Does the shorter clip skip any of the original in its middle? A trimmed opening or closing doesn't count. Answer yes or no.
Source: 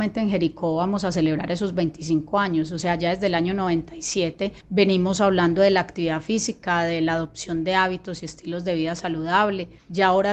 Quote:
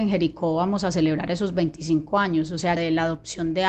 yes